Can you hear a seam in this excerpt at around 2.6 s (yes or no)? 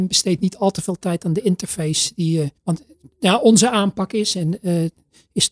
yes